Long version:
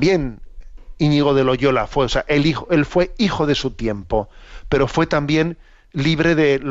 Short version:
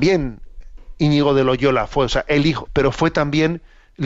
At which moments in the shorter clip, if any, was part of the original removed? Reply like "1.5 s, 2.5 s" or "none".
2.7 s